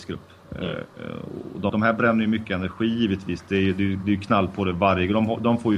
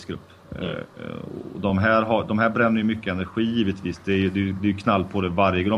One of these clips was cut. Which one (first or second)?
first